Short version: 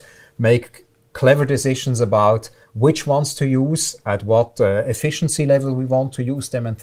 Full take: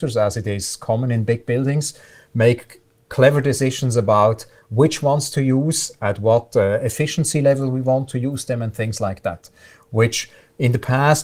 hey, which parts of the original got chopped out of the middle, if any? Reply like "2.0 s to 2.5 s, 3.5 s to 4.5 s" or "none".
none